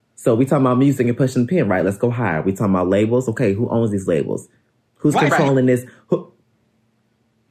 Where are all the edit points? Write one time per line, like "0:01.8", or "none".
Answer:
none